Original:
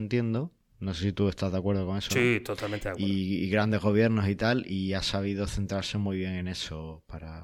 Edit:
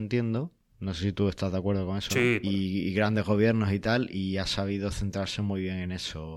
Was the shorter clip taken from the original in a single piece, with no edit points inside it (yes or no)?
no